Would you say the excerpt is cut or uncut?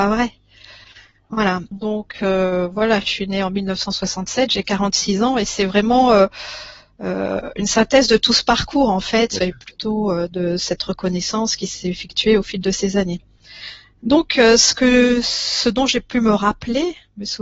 cut